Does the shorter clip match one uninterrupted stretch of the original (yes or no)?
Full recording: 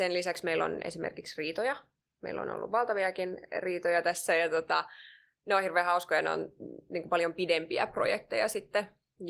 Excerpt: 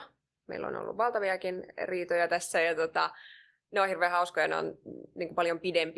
yes